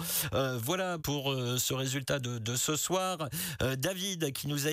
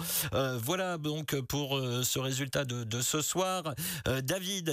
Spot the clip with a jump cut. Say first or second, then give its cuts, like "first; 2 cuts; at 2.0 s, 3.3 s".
first; 1 cut; at 1.0 s